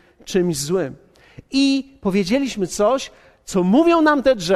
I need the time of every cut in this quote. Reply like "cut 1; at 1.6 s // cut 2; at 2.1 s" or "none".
none